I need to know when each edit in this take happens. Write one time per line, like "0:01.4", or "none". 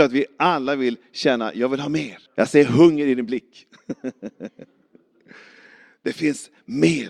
0:02.3

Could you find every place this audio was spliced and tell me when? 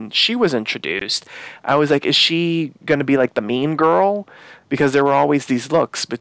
none

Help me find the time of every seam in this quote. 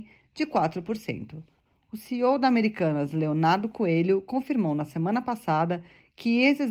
none

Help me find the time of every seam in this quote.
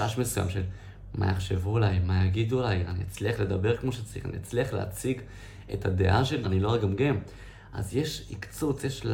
0:06.4

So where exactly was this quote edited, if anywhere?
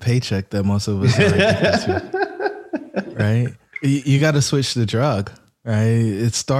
none

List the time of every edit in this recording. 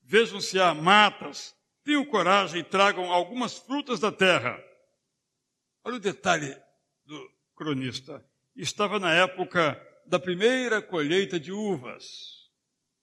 none

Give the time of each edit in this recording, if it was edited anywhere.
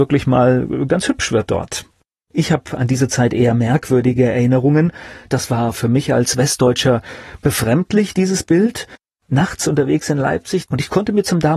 0:05.3
0:10.7

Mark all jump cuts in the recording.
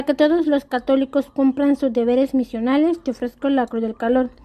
none

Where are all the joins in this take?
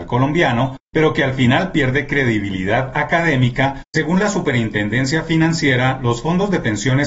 0:03.9

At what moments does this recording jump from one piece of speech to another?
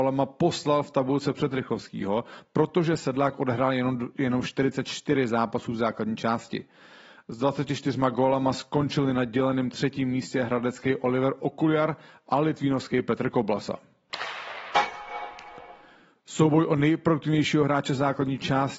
none

